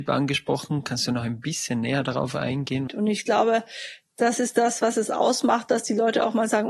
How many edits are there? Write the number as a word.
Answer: one